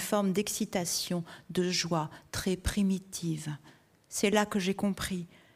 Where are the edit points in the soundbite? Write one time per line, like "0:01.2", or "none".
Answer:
none